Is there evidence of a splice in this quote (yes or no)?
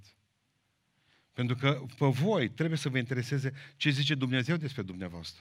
no